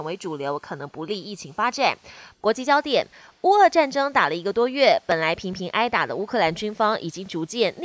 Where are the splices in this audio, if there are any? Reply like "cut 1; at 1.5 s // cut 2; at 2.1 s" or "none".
cut 1; at 2.3 s